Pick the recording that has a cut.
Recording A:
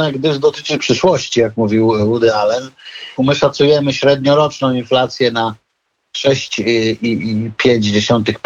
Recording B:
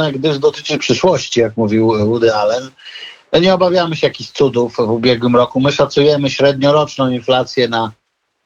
A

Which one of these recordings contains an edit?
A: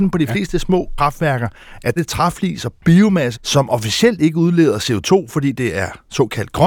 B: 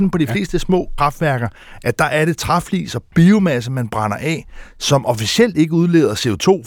A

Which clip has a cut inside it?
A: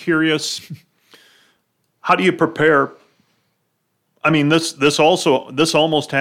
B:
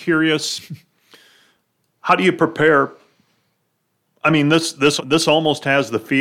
B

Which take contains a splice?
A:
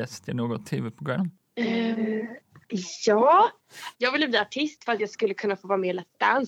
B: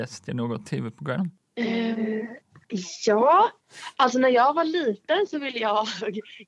A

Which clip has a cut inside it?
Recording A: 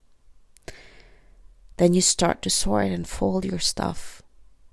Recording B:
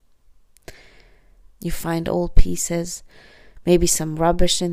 B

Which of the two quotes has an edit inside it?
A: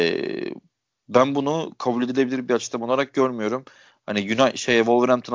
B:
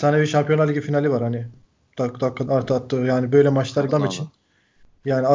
B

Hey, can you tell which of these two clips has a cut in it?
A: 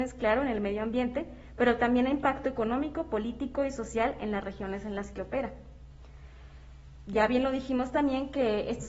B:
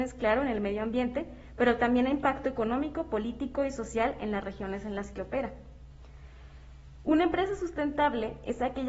B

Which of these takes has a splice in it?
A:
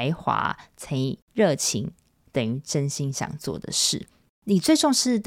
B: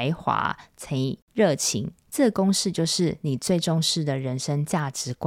B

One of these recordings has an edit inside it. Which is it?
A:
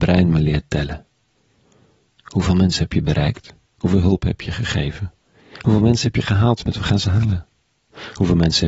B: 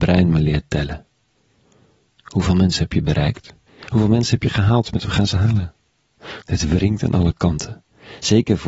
B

